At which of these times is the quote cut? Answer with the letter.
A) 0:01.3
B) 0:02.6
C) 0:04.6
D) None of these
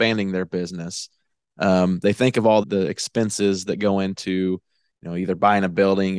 B